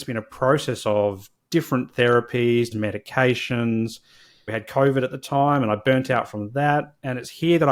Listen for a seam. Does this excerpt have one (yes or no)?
yes